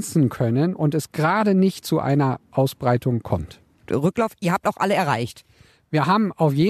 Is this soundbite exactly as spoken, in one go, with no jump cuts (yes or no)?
no